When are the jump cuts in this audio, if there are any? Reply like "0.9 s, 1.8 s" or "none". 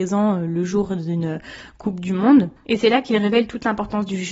2.6 s